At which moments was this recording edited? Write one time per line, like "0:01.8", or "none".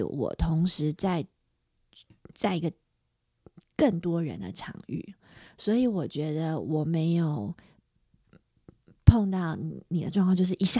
none